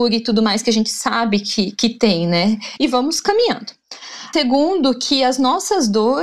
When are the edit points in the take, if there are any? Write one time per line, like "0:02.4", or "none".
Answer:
0:02.8
0:04.3

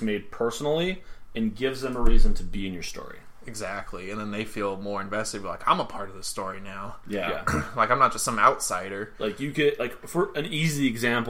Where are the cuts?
none

